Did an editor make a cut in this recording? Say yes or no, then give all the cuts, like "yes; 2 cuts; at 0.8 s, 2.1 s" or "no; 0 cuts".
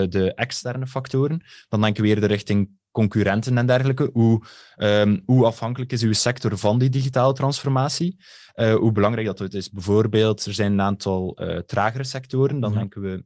no; 0 cuts